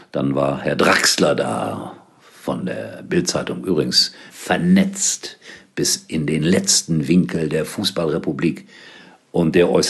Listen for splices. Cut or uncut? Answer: cut